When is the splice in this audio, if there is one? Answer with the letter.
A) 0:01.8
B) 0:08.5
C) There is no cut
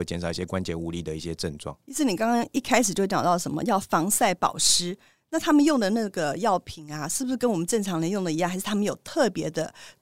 A